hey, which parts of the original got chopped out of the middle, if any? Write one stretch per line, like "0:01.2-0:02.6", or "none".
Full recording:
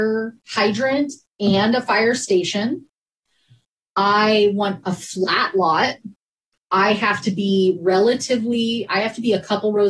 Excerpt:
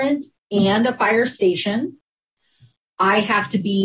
0:03.7-0:06.6

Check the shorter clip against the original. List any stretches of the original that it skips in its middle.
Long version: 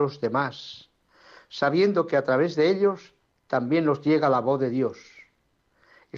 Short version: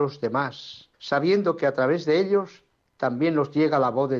0:00.9-0:01.4

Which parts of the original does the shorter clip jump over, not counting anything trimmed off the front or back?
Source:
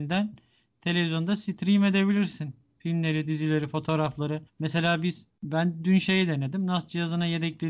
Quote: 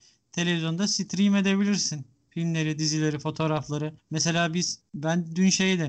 none

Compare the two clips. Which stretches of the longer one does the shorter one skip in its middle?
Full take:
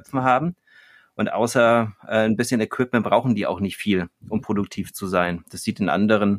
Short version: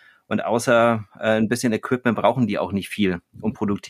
none

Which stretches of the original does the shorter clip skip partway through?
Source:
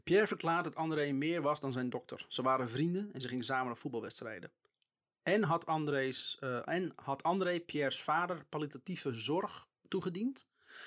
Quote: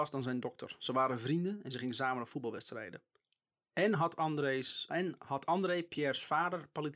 0:06.4-0:06.7

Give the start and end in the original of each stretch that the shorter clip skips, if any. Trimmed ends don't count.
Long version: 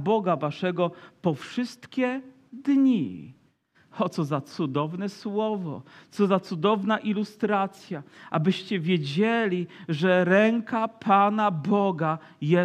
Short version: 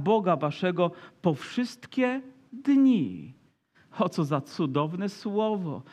none

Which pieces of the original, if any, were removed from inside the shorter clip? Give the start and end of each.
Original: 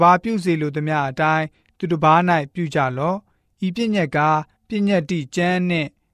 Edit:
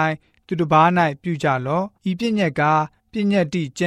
0:03.3-0:03.5

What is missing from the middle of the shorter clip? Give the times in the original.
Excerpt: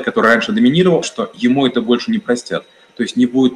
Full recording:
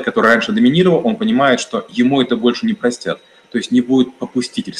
0:01.0-0:01.6

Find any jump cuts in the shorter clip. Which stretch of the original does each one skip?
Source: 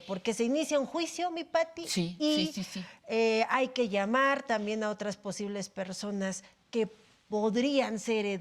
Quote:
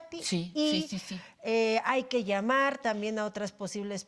none

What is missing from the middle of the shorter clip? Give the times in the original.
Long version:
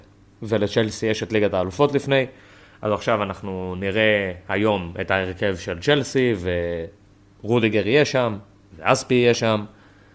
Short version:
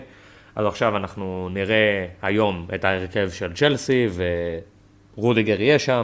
none

